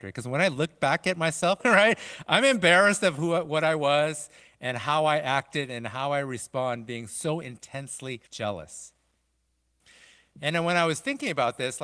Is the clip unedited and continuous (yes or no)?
no